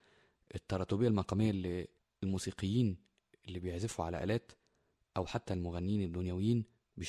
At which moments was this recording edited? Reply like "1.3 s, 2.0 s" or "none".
none